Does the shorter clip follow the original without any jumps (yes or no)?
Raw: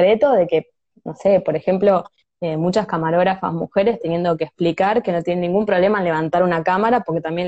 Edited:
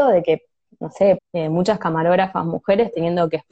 no